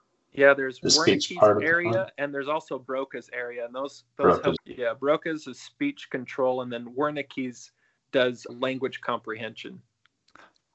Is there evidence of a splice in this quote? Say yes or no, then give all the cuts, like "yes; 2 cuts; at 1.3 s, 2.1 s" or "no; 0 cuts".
yes; 2 cuts; at 4.6 s, 8.5 s